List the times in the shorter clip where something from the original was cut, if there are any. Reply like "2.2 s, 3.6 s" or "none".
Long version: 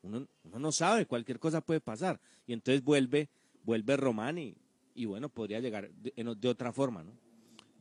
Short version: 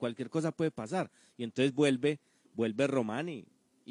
none